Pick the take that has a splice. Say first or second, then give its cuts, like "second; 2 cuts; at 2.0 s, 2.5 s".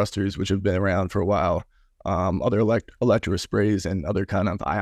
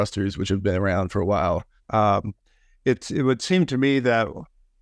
second; 1 cut; at 1.8 s